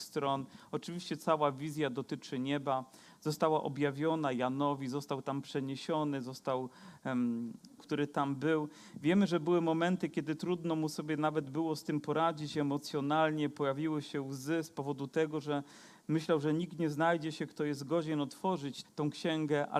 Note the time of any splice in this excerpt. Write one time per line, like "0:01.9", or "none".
0:07.8
0:18.8